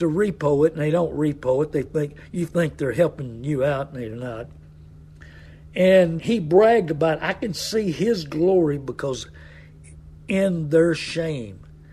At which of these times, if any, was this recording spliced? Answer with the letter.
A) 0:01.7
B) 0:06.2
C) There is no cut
B